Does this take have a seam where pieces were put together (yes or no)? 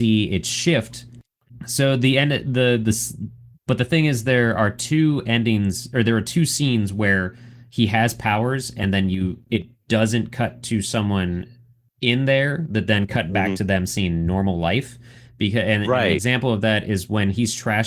no